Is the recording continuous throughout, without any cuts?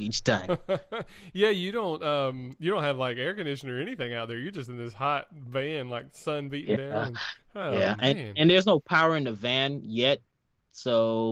yes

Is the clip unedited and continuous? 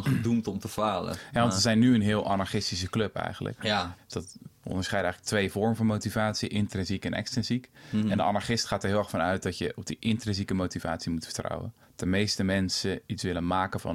no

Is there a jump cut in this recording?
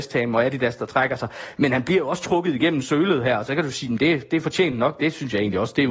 no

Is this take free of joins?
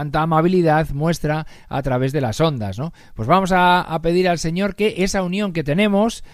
yes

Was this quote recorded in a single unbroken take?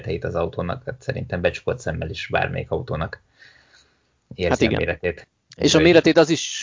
yes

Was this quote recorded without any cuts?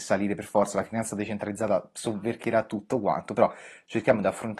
yes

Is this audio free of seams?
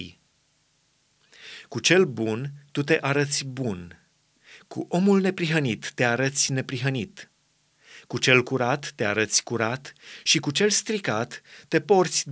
yes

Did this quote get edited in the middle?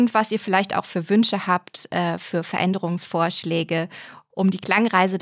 no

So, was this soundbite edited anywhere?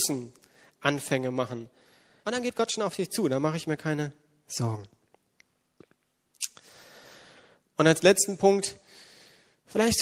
yes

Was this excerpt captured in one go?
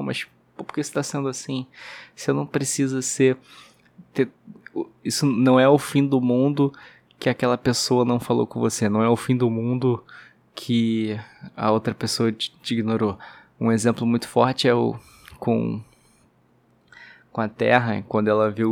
yes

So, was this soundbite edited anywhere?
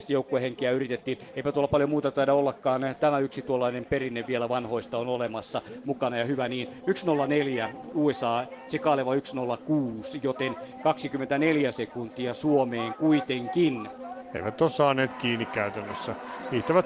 no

